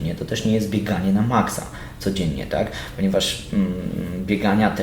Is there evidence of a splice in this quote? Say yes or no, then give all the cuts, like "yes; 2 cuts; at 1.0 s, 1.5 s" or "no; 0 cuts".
no; 0 cuts